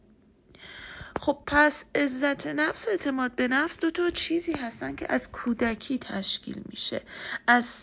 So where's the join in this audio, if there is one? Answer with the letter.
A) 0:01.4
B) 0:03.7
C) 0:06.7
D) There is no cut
A